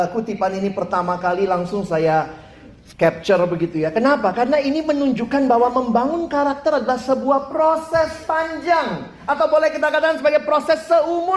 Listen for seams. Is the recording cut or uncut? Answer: uncut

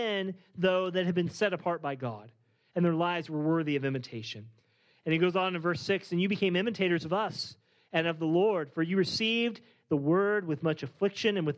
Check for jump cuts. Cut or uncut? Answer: uncut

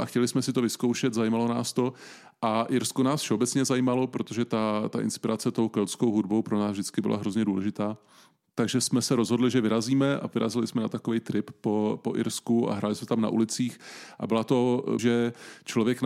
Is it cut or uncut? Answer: cut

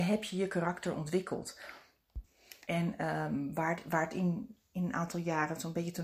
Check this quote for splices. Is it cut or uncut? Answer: cut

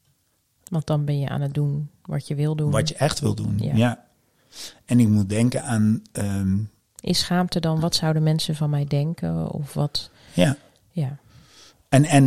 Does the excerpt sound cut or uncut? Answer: uncut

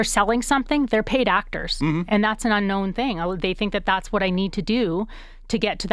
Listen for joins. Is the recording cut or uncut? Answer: uncut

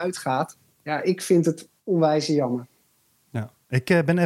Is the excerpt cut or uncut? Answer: uncut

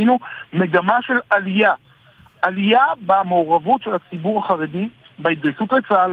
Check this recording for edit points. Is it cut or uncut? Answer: uncut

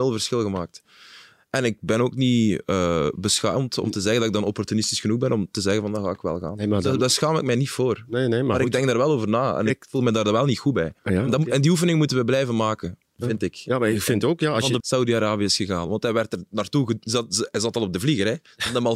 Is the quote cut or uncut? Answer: cut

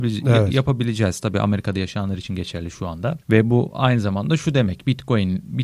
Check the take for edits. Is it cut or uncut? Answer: uncut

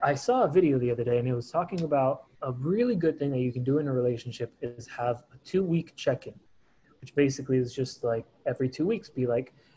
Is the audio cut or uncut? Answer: cut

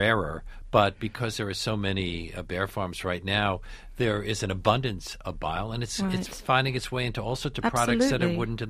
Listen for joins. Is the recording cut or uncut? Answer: uncut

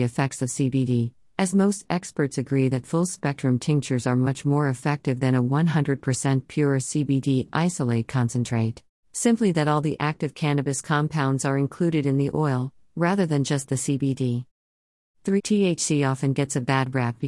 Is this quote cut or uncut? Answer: cut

